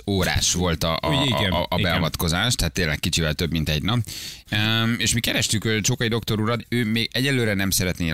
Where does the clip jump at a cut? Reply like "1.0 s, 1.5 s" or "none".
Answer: 4.4 s, 6.6 s